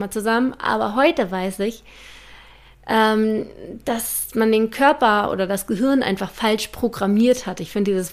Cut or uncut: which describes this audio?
uncut